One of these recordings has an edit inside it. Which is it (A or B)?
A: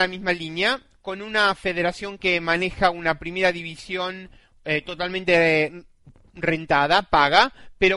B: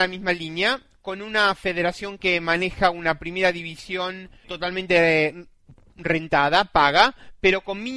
B